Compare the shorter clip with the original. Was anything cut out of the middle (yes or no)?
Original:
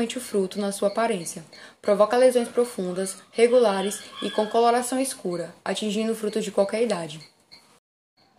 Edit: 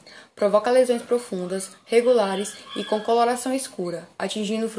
no